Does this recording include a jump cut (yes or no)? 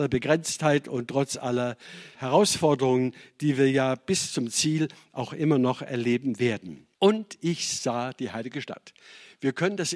yes